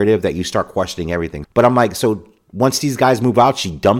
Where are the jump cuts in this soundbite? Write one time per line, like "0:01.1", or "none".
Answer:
0:01.4